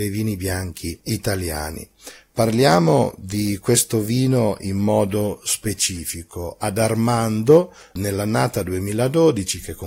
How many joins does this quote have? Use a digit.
0